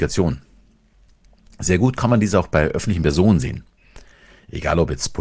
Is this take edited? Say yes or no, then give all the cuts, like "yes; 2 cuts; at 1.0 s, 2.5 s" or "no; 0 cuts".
no; 0 cuts